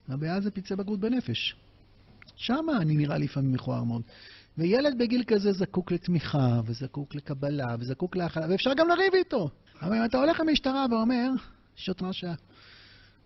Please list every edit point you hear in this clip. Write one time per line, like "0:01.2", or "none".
0:09.7
0:12.0